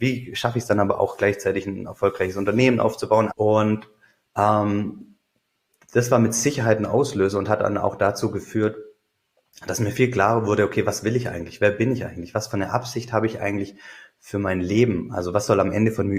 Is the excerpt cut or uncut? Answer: cut